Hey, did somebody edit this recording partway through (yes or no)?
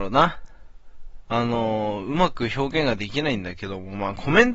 yes